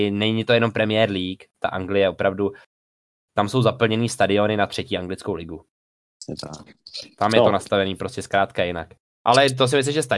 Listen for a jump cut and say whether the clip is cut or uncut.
uncut